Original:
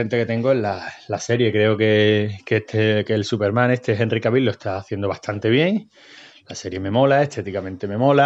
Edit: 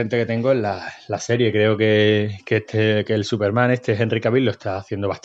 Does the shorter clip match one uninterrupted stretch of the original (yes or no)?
yes